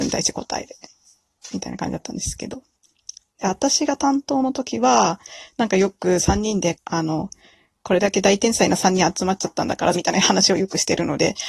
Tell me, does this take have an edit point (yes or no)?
yes